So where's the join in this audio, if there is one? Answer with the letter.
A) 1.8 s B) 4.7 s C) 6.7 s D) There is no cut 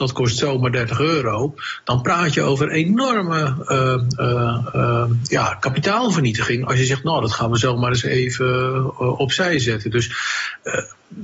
D